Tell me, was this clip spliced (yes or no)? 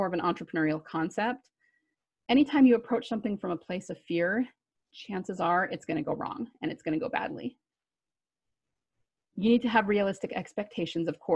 no